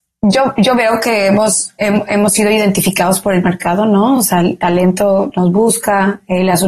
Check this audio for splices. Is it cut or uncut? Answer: uncut